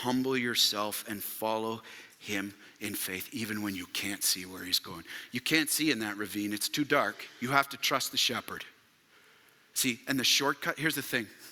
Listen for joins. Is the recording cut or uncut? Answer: cut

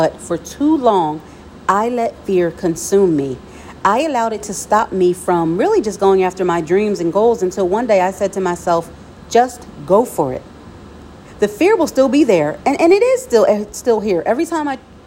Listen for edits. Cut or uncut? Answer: uncut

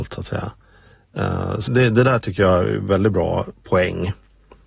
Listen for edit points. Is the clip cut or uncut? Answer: cut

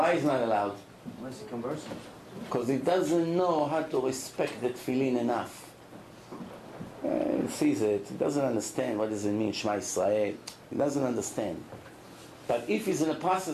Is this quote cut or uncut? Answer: uncut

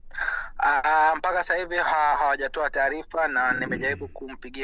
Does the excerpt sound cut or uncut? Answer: uncut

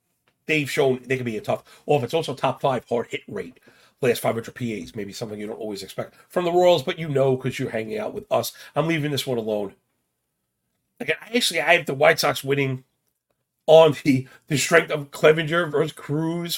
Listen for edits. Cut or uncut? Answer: uncut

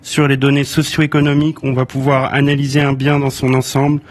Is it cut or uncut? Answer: uncut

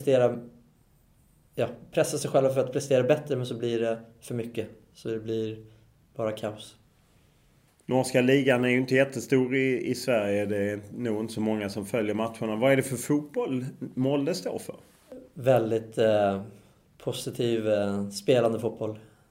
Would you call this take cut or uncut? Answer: uncut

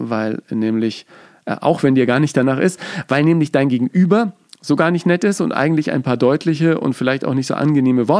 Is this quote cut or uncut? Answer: uncut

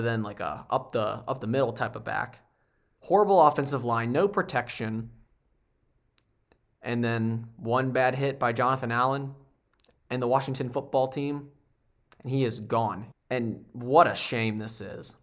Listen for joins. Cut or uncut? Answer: cut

